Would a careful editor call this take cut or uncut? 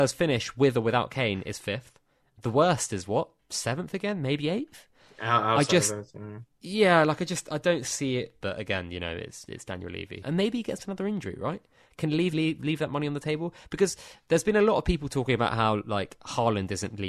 cut